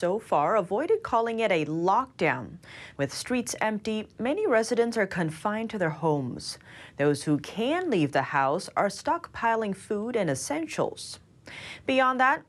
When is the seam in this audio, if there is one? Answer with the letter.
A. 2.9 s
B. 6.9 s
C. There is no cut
A